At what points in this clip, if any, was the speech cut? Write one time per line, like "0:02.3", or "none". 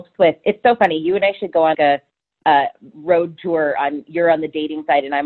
0:01.7
0:02.9